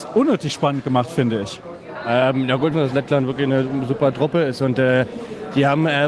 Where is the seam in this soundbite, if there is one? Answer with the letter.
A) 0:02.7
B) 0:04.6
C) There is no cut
A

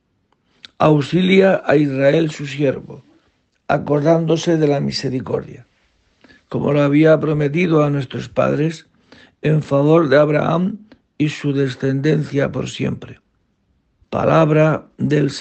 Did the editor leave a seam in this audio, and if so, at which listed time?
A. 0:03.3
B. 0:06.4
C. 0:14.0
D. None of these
C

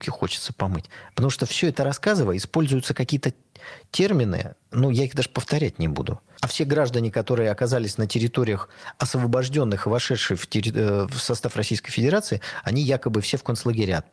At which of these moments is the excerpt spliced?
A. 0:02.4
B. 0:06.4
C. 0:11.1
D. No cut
B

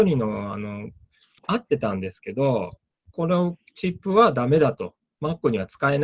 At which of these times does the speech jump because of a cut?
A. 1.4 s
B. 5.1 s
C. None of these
A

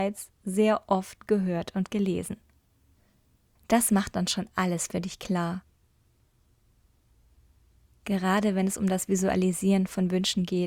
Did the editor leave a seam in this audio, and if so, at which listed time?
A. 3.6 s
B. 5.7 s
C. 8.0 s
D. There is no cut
A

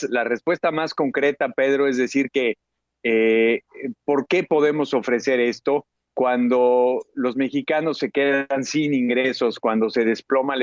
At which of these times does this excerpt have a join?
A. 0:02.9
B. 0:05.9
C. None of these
B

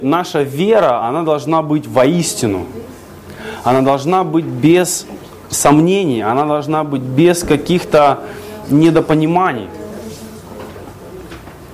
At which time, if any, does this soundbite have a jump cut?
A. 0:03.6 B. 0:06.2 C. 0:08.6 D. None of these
C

